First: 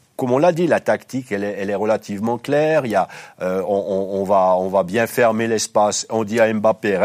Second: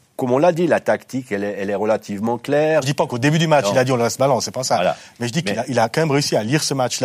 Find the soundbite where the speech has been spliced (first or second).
second